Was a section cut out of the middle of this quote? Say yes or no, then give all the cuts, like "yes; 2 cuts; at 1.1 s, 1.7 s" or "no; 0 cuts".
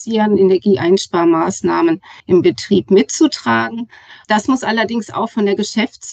yes; 1 cut; at 2.2 s